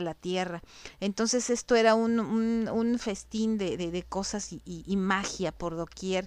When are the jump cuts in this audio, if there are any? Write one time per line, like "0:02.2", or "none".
none